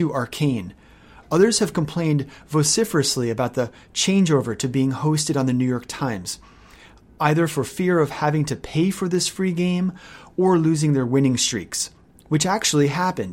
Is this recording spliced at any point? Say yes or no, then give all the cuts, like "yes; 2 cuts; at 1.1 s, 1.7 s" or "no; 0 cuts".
no; 0 cuts